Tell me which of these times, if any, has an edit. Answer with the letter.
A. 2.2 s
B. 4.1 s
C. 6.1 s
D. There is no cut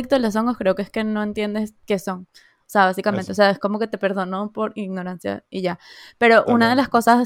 D